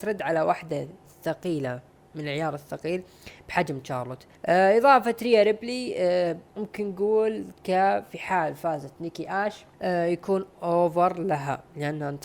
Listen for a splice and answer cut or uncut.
cut